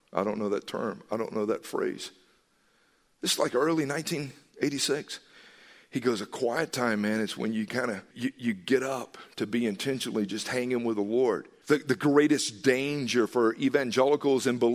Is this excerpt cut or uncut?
cut